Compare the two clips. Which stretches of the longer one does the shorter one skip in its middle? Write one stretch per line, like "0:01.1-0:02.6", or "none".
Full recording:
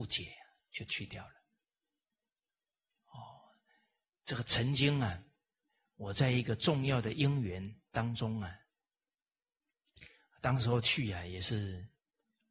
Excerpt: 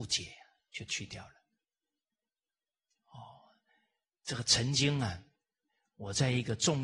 none